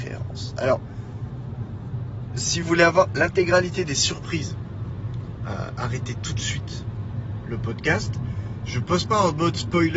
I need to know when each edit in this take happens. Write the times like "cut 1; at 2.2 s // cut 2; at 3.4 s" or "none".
cut 1; at 2.6 s

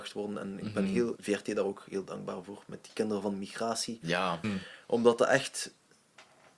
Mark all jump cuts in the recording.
cut 1; at 1.2 s // cut 2; at 4.4 s

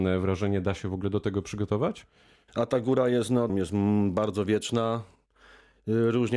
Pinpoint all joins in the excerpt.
cut 1; at 2.5 s // cut 2; at 3.5 s

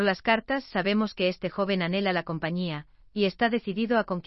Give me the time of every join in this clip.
none

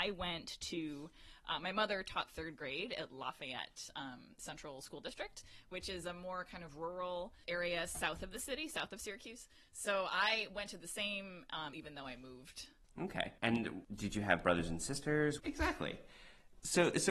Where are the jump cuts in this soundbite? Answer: cut 1; at 7.4 s // cut 2; at 11.7 s // cut 3; at 15.4 s

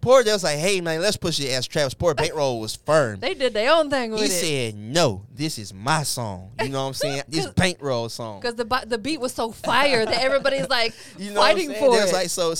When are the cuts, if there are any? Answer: cut 1; at 7.3 s

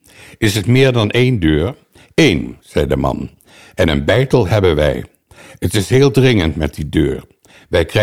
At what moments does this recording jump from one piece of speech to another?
none

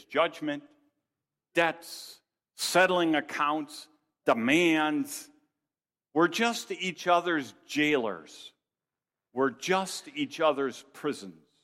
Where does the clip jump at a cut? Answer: cut 1; at 1.4 s

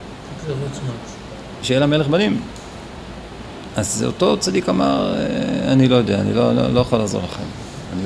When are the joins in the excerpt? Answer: cut 1; at 1.6 s

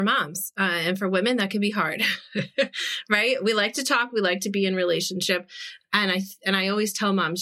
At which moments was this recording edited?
none

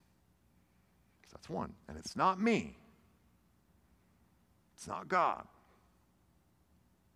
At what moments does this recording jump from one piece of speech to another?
cut 1; at 1.8 s

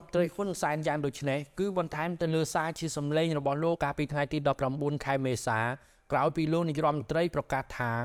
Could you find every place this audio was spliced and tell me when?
cut 1; at 3.8 s

